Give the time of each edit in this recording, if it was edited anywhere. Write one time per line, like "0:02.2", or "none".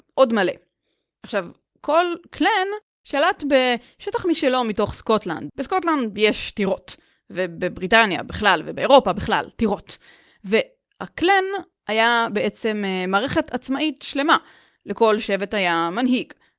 0:05.5